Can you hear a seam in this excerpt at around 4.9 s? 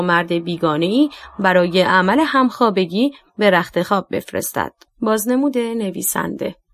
yes; 1 cut; at 4.9 s

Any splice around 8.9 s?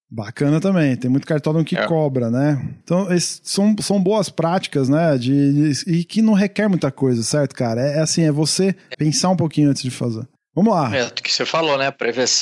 yes; 2 cuts; at 2.8 s, 8.9 s

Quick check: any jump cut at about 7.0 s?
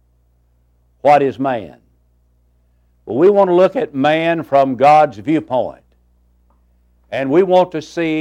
no; 0 cuts

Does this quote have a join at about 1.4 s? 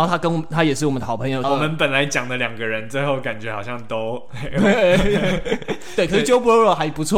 yes; 1 cut; at 1.4 s

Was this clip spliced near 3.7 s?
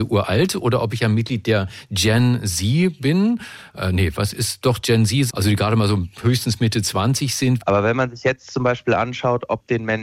no; 2 cuts; at 5.3 s, 7.6 s

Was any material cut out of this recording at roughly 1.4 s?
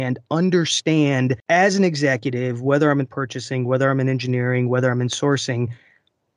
yes; 1 cut; at 1.4 s

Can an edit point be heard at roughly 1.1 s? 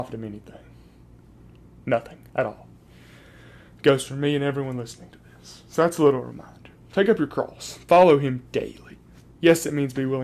no; 0 cuts

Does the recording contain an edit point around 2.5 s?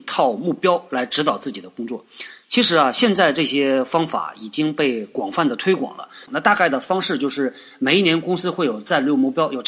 no; 1 cut; at 6.3 s

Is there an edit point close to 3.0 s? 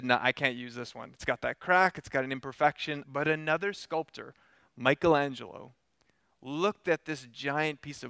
yes; 1 cut; at 3.0 s

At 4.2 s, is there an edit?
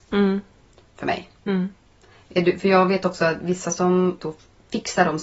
yes; 1 cut; at 4.2 s

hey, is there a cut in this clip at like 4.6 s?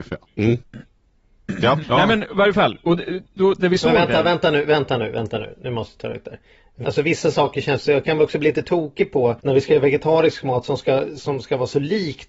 no; 3 cuts; at 1.8 s, 6.8 s, 9.4 s

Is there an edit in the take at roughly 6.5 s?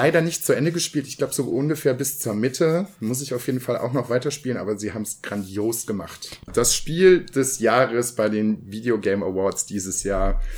yes; 1 cut; at 6.5 s

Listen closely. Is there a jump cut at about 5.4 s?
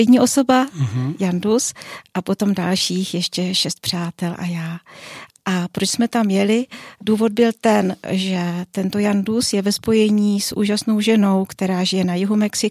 no; 0 cuts

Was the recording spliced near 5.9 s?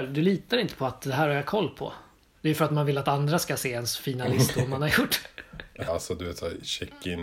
yes; 2 cuts; at 2.4 s, 5.9 s

